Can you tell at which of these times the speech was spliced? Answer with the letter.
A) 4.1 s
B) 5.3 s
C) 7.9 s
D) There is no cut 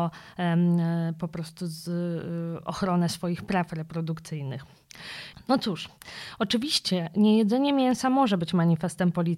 B